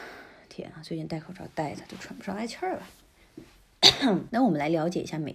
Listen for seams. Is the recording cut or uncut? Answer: cut